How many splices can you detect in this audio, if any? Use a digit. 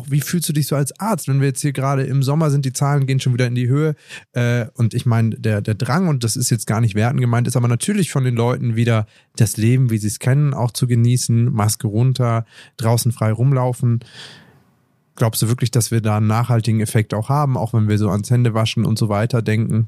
1